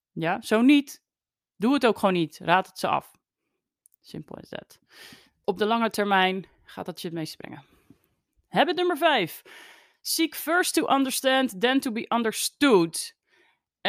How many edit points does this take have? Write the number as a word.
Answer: one